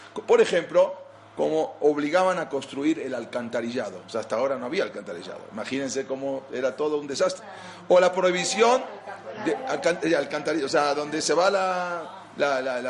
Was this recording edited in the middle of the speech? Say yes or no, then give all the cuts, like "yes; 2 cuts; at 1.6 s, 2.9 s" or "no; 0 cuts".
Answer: no; 0 cuts